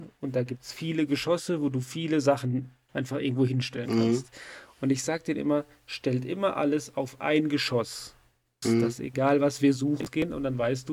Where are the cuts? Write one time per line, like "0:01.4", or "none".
0:08.6